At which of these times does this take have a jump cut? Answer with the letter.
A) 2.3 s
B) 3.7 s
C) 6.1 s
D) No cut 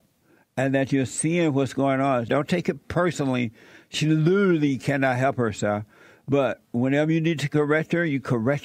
A